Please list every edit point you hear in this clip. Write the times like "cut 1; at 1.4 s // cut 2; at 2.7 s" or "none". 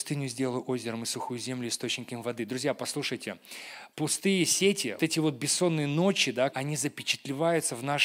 cut 1; at 5.0 s // cut 2; at 6.5 s